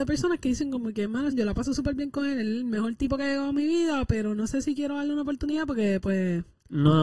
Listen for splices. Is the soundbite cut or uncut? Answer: cut